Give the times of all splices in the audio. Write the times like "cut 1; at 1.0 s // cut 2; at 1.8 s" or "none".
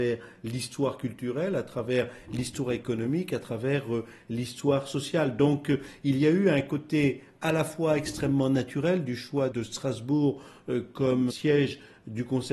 cut 1; at 9.5 s